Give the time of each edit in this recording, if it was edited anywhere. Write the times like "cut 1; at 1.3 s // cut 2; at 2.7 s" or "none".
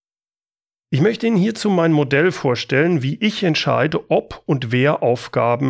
none